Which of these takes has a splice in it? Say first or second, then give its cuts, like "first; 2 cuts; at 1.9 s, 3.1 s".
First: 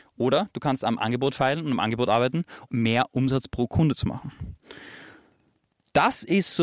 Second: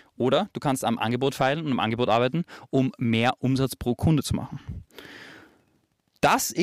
first; 1 cut; at 2.7 s